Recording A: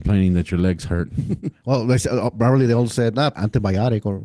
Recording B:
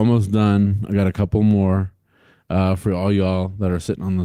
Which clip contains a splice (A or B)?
A